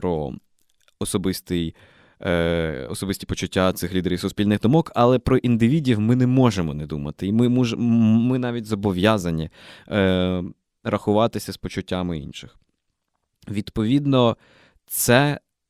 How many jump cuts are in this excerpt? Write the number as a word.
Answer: zero